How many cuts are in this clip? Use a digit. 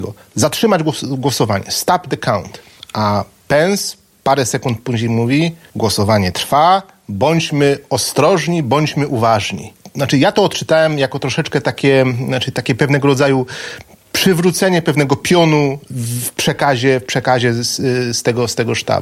0